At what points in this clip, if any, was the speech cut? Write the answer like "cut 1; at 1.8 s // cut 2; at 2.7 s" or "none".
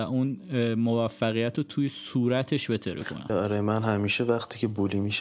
cut 1; at 3.3 s